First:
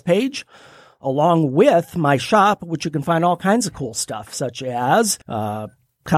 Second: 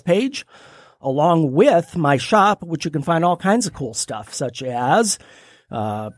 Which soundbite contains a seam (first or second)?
first